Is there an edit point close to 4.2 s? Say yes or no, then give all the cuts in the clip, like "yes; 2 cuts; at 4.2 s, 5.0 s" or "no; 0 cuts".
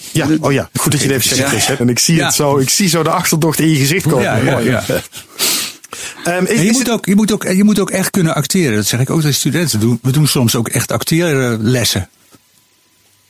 no; 1 cut; at 1.8 s